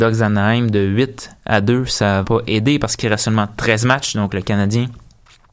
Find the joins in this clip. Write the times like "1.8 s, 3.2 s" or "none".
2.2 s